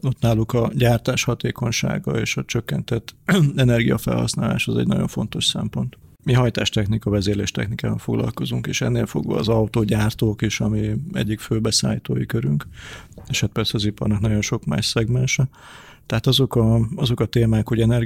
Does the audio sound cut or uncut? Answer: cut